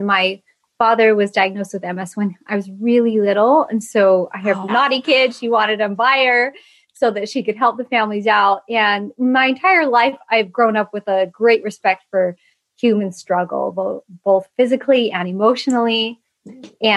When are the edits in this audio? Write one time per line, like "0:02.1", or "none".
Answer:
0:04.7
0:09.1